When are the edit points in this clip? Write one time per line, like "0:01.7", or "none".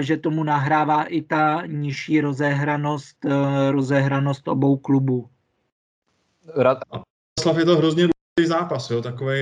0:06.8